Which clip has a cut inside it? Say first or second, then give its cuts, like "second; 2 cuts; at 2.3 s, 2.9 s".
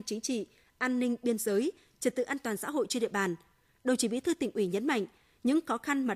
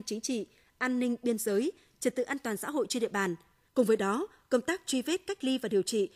second; 1 cut; at 3.7 s